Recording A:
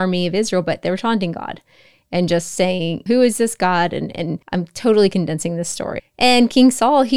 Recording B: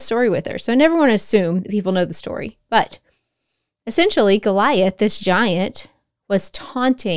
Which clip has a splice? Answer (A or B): A